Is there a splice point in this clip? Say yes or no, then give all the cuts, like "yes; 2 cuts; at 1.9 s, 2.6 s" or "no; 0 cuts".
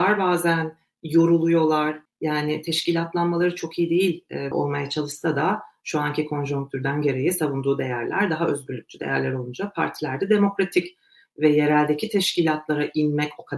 yes; 2 cuts; at 2.1 s, 4.5 s